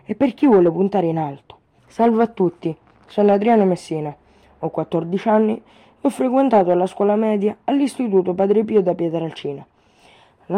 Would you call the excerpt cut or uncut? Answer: cut